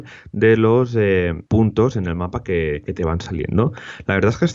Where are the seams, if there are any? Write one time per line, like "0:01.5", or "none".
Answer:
0:01.5